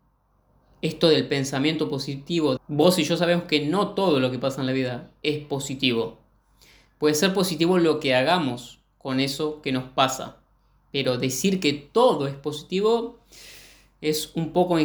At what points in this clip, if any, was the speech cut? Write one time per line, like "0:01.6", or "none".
0:02.6